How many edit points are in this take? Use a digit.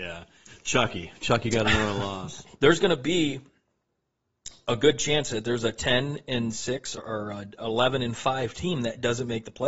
2